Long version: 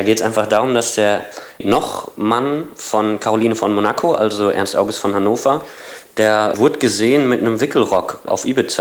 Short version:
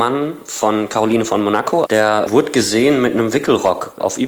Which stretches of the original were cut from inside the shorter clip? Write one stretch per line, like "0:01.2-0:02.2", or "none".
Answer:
0:04.2-0:06.1